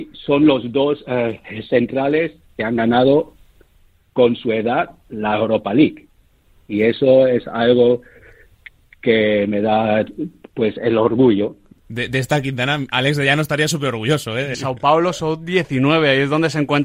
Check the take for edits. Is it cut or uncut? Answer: cut